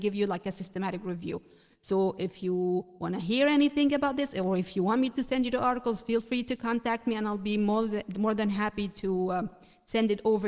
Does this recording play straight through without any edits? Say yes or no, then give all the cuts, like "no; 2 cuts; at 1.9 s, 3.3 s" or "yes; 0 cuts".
yes; 0 cuts